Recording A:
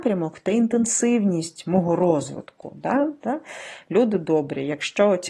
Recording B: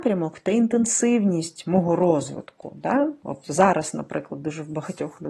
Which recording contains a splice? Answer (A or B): A